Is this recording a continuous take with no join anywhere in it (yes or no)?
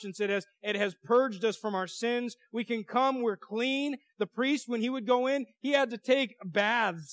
yes